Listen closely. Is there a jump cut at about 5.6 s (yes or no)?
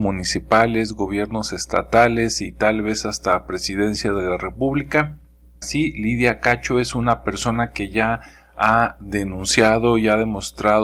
yes